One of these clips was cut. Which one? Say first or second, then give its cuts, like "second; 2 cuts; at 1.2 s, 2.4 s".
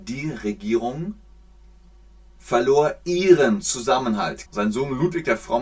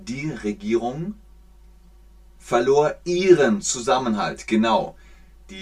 first; 1 cut; at 4.5 s